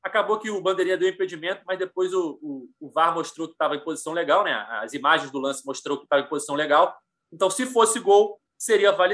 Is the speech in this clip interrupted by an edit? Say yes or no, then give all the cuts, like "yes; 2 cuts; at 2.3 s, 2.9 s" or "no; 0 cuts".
no; 0 cuts